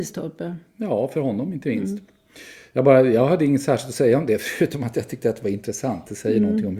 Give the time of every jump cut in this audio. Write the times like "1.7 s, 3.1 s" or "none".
none